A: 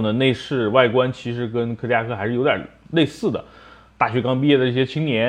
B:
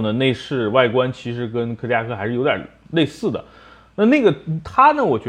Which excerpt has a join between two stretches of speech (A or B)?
A